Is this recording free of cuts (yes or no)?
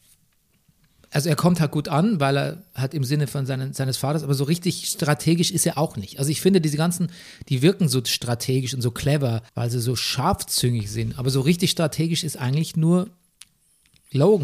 no